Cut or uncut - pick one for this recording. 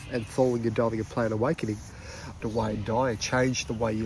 cut